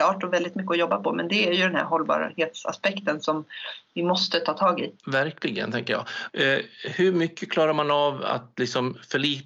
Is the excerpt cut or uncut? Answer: cut